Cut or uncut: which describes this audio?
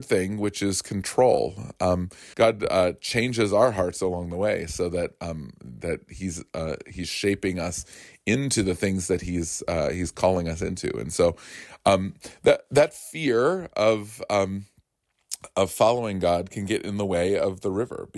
cut